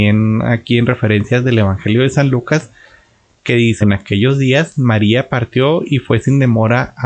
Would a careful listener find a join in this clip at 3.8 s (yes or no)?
yes